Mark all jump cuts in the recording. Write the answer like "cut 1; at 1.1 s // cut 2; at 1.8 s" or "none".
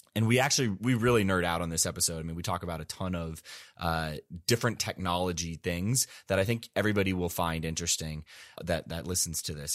cut 1; at 8.6 s